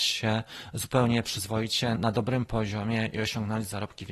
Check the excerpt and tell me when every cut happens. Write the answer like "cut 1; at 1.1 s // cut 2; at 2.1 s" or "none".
cut 1; at 2.0 s